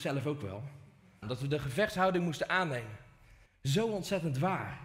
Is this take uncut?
no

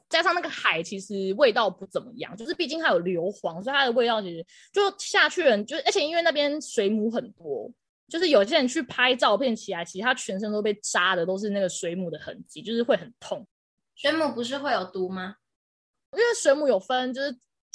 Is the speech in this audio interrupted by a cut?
no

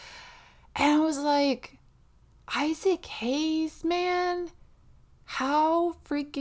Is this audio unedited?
yes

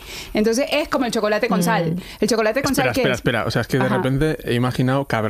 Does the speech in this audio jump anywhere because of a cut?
no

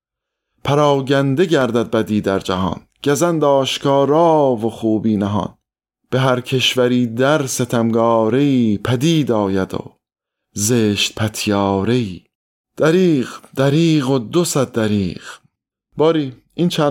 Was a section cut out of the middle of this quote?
no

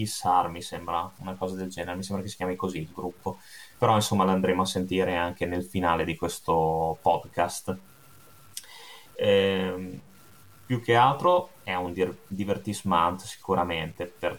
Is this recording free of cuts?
no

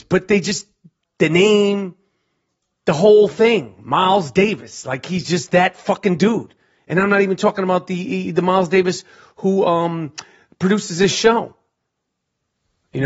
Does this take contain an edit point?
no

